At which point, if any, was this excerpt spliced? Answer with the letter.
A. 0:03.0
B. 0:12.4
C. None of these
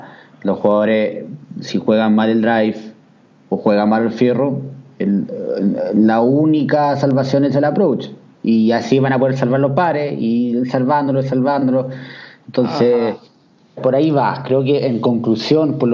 C